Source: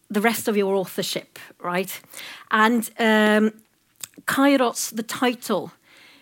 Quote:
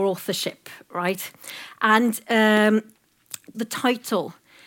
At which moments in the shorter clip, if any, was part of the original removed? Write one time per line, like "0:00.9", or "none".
0:03.5